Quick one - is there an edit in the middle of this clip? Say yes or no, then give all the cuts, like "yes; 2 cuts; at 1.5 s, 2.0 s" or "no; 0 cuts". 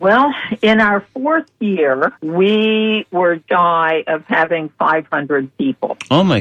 yes; 2 cuts; at 2.2 s, 3.5 s